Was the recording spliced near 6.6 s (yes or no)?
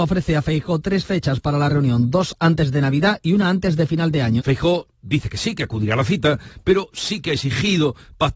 no